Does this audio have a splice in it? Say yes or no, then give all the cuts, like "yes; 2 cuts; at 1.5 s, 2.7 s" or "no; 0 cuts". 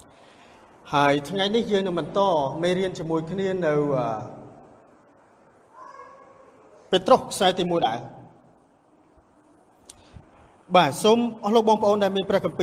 yes; 1 cut; at 7.8 s